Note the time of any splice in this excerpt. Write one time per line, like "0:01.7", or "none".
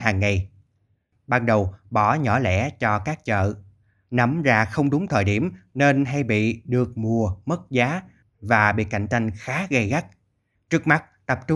0:10.6

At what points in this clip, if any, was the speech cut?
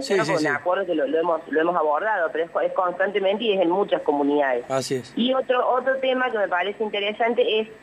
none

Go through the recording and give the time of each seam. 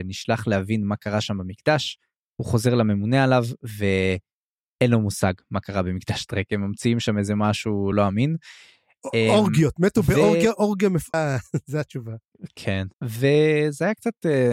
0:07.9
0:11.1
0:12.9

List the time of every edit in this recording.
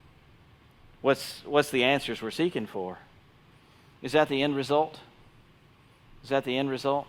0:03.9

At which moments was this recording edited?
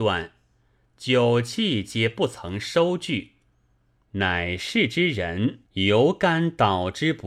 0:04.0
0:05.6

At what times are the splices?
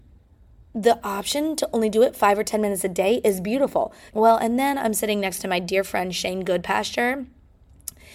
0:04.1

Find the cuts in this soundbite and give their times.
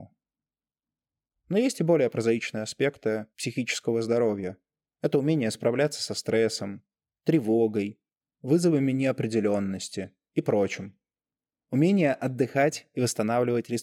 0:03.3

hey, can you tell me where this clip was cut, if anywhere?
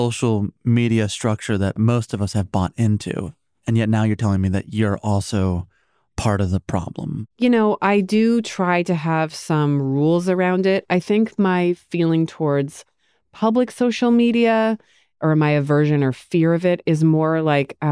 0:07.3

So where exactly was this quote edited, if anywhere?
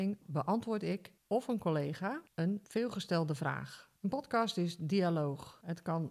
0:04.0

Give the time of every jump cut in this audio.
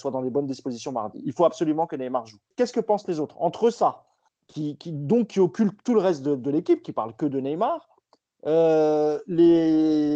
0:02.5
0:04.3

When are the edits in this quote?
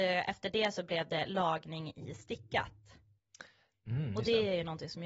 none

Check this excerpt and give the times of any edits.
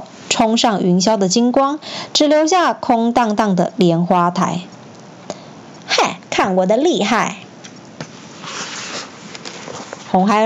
0:05.8

